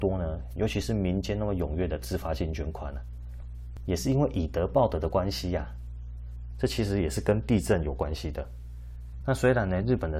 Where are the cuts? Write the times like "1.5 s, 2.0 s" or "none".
6.5 s, 9.2 s